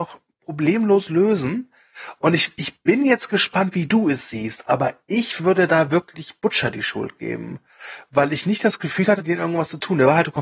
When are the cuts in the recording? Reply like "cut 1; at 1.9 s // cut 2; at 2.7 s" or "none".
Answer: cut 1; at 9.2 s